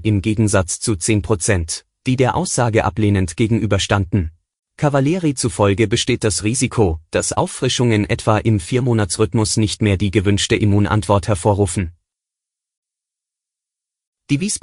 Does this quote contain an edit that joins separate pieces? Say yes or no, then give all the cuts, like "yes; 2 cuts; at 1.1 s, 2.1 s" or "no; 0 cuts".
yes; 1 cut; at 4.6 s